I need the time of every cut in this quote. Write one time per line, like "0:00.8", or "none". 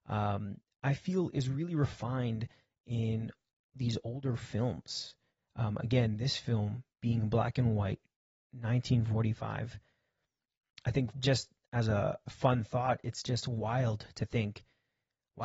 0:11.1